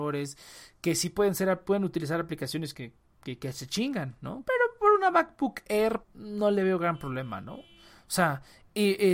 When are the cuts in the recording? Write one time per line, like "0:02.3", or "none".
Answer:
0:02.7
0:04.4
0:06.0